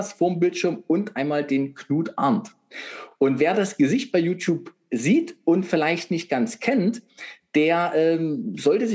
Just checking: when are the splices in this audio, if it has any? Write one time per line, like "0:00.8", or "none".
none

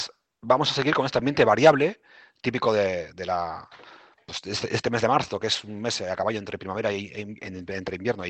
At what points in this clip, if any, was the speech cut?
none

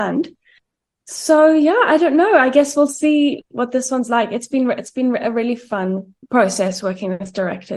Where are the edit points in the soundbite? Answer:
0:06.2

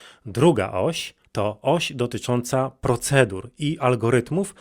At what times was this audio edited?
0:01.3

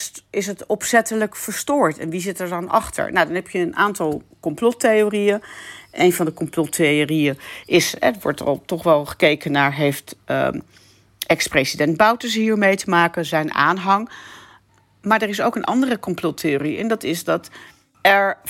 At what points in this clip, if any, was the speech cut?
0:04.3

